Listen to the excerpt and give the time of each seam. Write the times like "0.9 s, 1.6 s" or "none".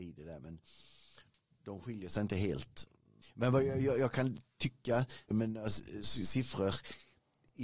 3.2 s, 5.3 s